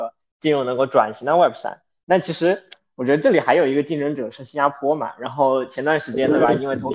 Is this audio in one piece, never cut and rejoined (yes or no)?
yes